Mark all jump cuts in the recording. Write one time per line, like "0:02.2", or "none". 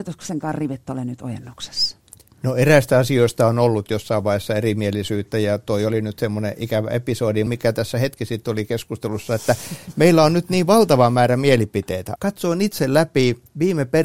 0:07.5
0:12.2